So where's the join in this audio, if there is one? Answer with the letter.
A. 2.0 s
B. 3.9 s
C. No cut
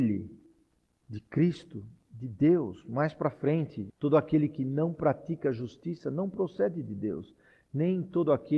B